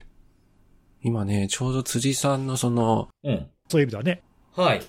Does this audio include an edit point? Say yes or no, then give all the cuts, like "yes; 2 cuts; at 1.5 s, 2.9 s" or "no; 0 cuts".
yes; 1 cut; at 3.7 s